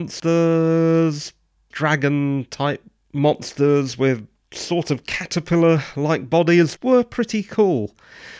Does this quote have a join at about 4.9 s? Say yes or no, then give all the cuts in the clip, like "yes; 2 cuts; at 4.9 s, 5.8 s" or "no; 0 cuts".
no; 2 cuts; at 1.7 s, 6.8 s